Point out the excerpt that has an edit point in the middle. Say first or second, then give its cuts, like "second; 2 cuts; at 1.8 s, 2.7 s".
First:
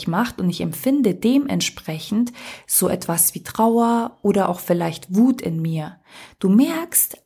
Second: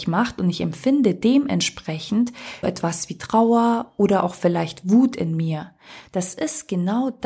second; 2 cuts; at 2.6 s, 6.1 s